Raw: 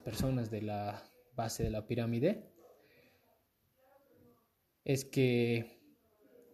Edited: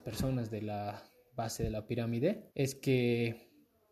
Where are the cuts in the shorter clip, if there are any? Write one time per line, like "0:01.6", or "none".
0:02.5